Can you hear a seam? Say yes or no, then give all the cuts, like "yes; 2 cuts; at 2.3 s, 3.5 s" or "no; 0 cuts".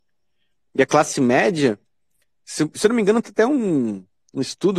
no; 0 cuts